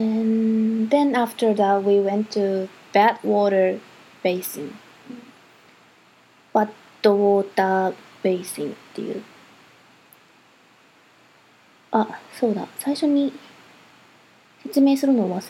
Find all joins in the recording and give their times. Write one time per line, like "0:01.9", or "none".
none